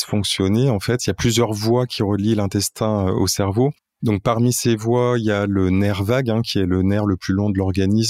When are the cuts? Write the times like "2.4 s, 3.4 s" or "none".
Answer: none